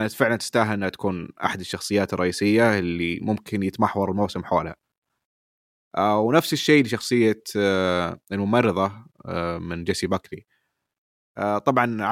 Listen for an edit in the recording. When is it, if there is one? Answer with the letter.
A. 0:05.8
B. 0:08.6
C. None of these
C